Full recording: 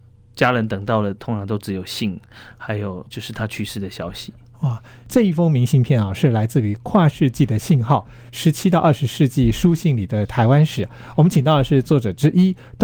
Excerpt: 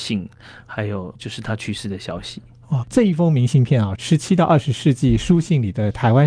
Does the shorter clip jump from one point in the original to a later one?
yes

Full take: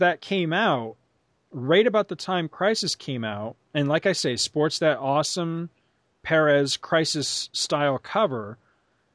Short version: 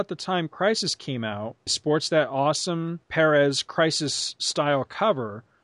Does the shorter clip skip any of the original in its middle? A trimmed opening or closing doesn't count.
yes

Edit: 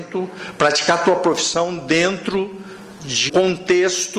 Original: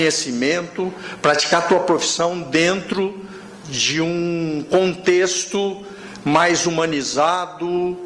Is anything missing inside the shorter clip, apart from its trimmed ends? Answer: yes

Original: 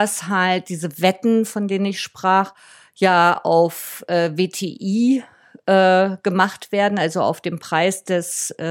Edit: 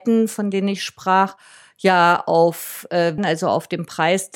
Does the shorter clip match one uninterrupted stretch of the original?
no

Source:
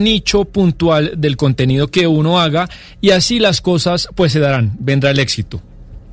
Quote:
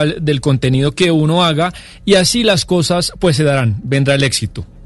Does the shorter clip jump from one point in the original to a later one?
no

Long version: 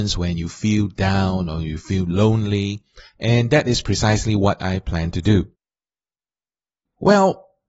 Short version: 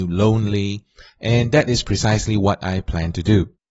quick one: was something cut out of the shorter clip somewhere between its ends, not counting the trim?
no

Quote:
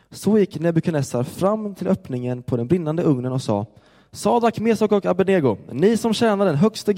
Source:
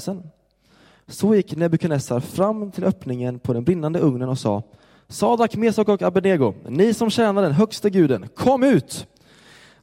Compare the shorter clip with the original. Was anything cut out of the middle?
no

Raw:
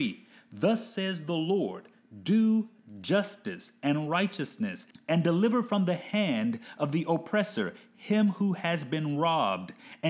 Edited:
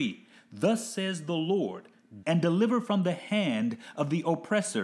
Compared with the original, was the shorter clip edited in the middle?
yes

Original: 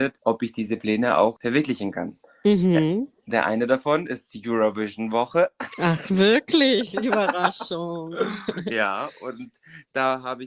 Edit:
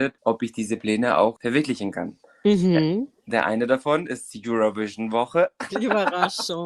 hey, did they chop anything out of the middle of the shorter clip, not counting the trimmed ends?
yes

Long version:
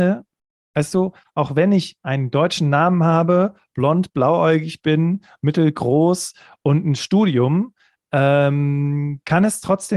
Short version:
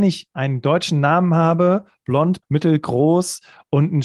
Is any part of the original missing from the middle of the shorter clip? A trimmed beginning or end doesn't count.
yes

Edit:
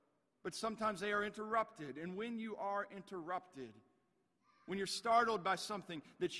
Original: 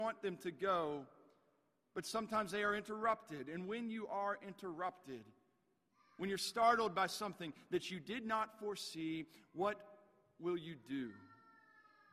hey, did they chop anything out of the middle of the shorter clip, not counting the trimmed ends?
no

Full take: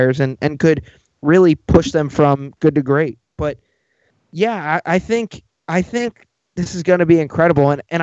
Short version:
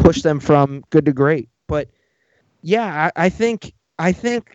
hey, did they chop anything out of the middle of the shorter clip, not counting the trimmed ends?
no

